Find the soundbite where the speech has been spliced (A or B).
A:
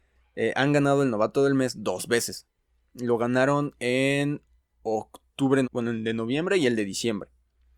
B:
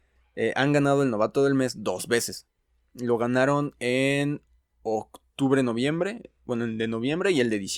A